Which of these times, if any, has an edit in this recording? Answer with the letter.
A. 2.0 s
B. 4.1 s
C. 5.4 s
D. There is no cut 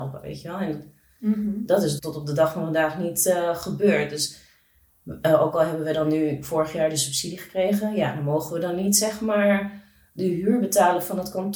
A